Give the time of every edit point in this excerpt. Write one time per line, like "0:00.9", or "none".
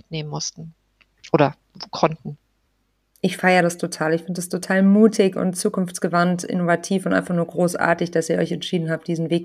none